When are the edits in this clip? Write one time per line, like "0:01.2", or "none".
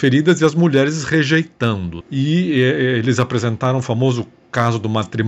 0:02.0